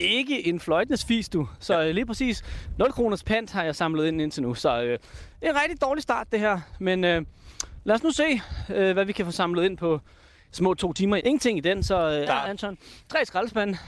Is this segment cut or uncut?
cut